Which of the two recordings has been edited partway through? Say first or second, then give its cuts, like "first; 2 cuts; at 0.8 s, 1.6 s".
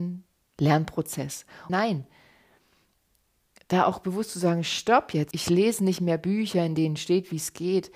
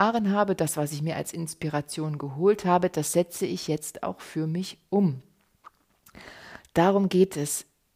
first; 2 cuts; at 1.7 s, 5.3 s